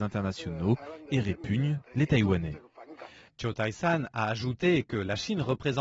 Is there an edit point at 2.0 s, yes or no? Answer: no